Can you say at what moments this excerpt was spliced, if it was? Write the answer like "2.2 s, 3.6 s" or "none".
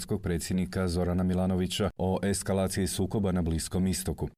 none